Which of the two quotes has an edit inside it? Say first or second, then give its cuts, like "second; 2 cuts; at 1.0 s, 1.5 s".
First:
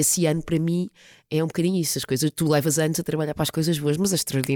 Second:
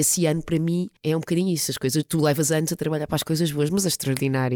second; 1 cut; at 1.0 s